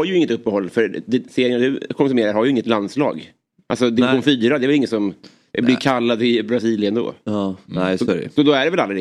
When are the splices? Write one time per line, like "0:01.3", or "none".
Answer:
none